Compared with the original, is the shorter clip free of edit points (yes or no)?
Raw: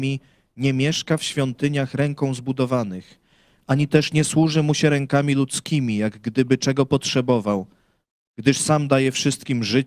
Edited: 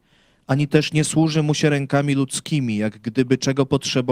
yes